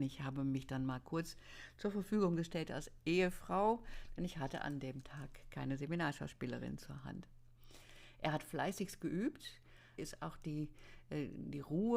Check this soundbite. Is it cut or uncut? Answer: cut